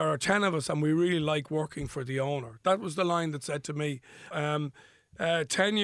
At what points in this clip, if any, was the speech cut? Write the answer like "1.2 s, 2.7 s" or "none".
4.3 s